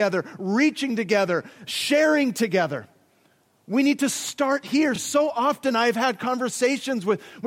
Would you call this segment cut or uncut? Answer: uncut